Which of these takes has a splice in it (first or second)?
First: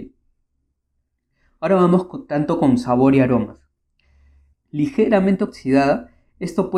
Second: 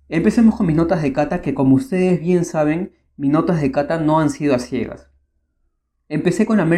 first